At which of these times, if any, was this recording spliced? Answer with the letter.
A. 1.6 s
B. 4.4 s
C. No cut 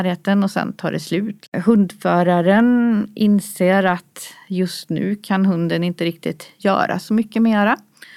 C